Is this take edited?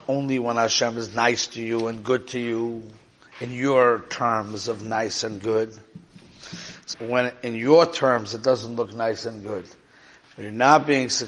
yes; 2 cuts; at 6.9 s, 10.2 s

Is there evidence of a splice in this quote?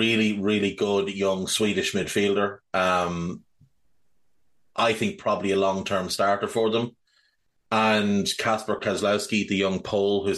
no; 0 cuts

